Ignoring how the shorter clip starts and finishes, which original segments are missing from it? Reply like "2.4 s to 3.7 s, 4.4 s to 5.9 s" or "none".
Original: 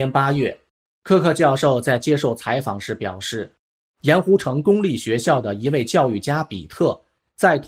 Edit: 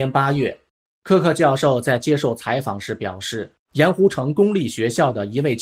3.6 s to 3.9 s

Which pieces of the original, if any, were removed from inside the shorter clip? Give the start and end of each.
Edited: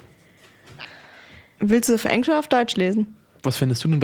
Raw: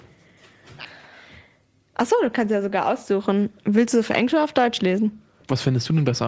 1.6 s to 3.6 s

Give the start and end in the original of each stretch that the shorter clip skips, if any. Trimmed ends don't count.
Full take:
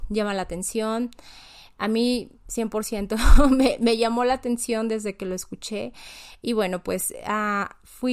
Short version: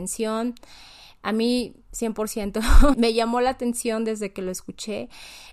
3.5 s to 3.8 s

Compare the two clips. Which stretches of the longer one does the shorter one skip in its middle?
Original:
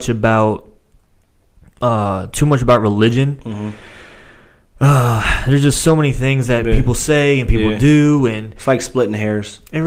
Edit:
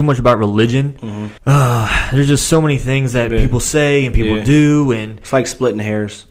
3.8 s to 4.7 s

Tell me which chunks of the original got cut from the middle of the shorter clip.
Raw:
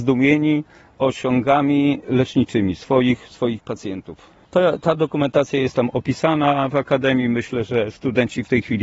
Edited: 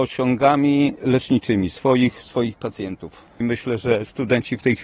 4.5 s to 7.3 s

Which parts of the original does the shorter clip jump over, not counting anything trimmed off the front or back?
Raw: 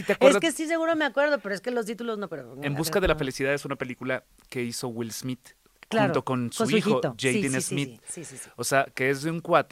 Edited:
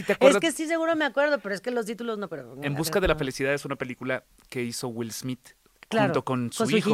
none

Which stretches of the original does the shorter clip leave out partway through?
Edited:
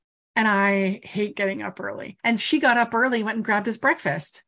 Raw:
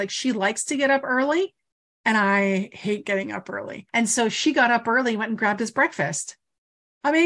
4.1 s to 4.3 s

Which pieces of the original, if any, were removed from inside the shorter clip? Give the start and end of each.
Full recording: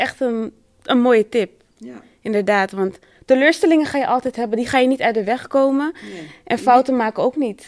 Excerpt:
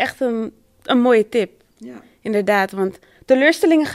none

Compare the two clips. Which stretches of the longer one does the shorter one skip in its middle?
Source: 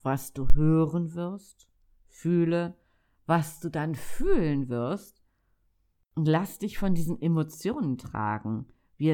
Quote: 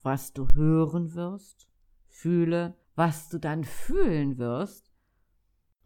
2.8 s to 3.1 s

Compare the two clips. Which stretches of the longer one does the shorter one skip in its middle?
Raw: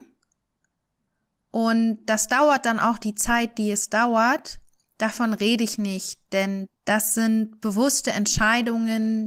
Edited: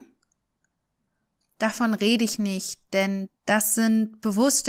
1.4 s to 4.8 s

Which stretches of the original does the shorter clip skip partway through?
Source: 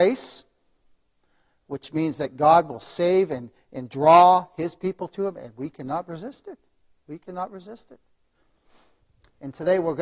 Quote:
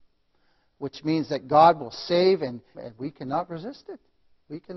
3.6 s to 5.3 s

